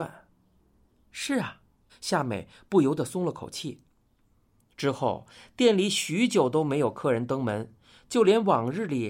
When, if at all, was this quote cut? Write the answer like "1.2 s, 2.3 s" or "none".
1.9 s